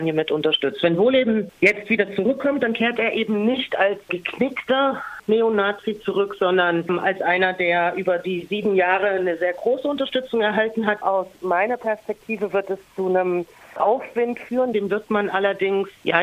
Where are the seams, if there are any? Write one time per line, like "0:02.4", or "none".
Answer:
0:11.0
0:14.7